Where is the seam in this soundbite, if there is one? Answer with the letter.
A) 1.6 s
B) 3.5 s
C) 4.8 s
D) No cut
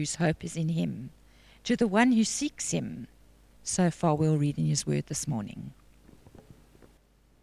B